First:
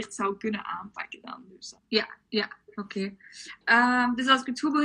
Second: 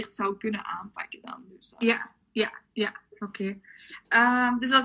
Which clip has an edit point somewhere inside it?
first; 1 cut; at 1.8 s

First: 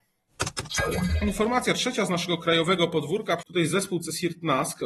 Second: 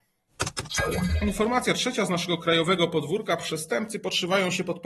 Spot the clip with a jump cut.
first; 1 cut; at 3.4 s

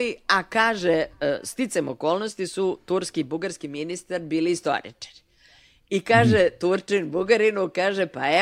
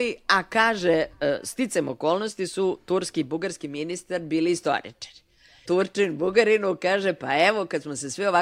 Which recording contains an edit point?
second; 1 cut; at 5.6 s

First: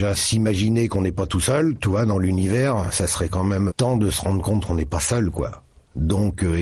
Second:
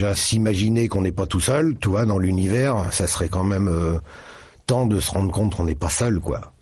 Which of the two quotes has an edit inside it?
first; 1 cut; at 3.7 s

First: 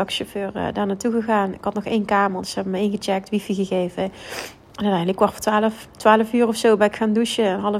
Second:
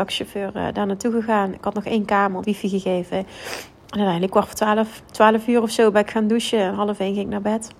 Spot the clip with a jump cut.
second; 1 cut; at 2.4 s

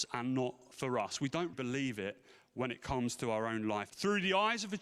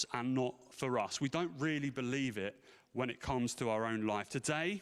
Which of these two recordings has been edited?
first; 2 cuts; at 1.5 s, 3.9 s

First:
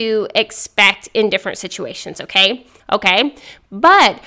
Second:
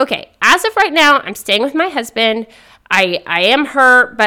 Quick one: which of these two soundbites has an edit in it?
first; 1 cut; at 2.8 s

